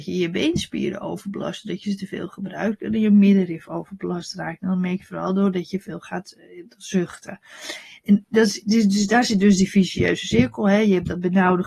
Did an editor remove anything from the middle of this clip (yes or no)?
no